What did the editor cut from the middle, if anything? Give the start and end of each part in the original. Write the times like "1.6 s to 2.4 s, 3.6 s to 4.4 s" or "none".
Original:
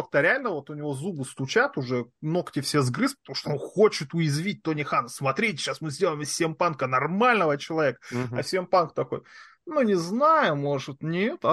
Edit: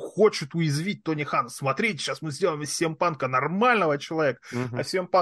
none